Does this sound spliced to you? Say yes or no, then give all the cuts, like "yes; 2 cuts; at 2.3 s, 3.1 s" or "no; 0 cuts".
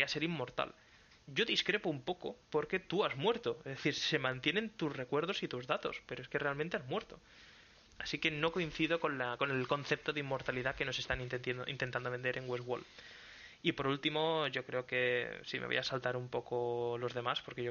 no; 0 cuts